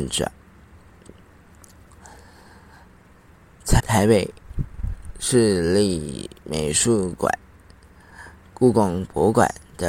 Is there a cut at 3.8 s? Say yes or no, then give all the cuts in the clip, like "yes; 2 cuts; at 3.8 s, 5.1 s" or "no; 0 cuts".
yes; 1 cut; at 3.8 s